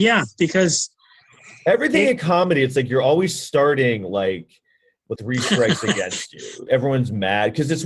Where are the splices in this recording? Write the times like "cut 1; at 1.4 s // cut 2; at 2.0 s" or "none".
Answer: cut 1; at 5.2 s // cut 2; at 6.7 s